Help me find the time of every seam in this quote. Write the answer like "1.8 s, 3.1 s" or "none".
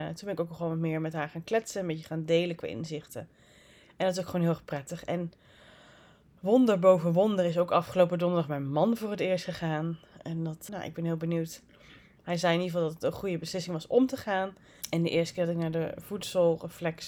10.7 s, 14.8 s